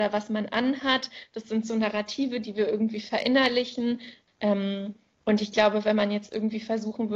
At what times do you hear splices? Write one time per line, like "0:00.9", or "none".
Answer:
0:04.3